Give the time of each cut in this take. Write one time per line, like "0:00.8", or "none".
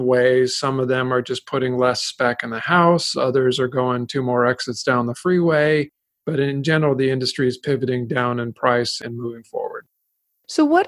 0:03.1